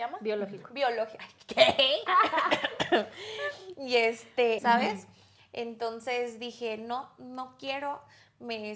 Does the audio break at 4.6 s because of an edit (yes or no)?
yes